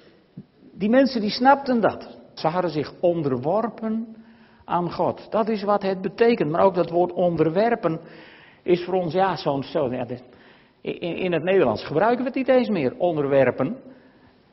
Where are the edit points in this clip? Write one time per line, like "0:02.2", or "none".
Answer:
0:02.4